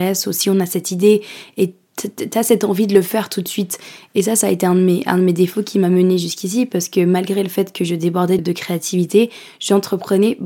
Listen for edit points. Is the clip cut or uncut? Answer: cut